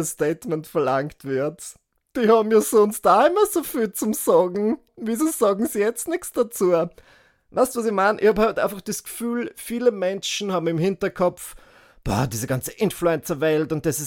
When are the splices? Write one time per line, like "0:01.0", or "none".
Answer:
none